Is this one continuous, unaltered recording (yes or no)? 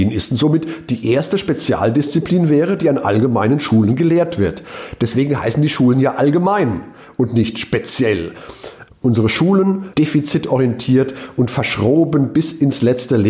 no